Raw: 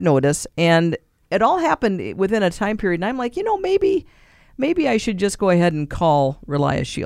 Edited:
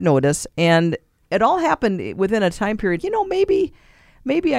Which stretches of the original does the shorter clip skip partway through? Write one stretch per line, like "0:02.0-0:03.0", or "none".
0:03.0-0:03.3